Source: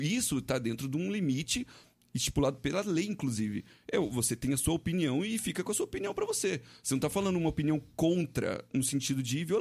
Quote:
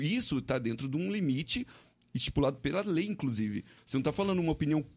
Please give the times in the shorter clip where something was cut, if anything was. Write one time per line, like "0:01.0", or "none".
0:03.8